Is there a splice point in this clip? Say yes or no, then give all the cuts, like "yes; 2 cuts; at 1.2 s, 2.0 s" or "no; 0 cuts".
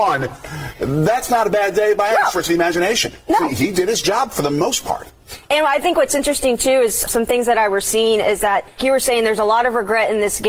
yes; 2 cuts; at 7.1 s, 8.8 s